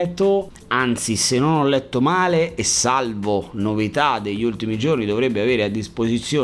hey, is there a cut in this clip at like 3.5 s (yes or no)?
no